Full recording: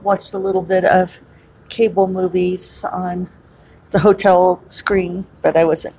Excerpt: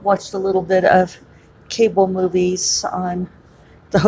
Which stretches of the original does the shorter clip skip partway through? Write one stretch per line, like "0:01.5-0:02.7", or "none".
none